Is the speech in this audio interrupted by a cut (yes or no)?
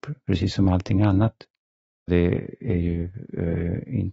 yes